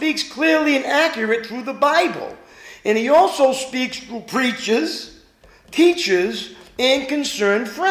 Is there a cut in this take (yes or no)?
no